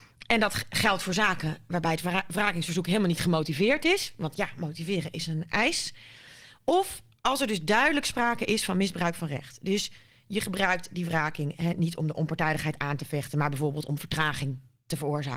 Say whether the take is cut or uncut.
uncut